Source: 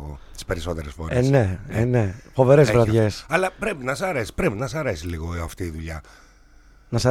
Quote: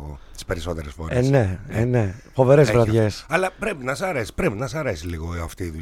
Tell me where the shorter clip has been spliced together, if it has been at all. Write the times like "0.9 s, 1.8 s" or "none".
none